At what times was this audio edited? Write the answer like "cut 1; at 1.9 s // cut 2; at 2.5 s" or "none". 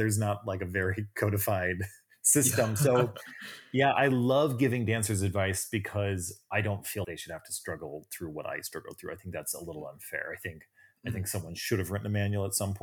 cut 1; at 7.0 s